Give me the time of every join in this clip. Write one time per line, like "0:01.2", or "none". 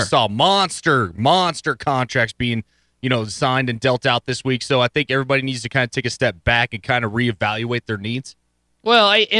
none